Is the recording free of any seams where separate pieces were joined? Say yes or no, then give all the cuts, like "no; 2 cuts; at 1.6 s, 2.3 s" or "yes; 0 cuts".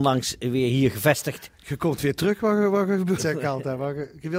no; 1 cut; at 3.2 s